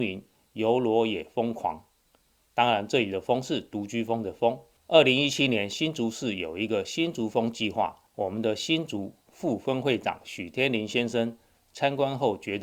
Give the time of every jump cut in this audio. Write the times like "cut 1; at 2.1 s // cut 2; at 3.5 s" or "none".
cut 1; at 4.8 s // cut 2; at 8.1 s